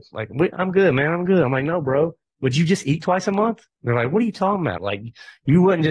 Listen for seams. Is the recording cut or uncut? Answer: cut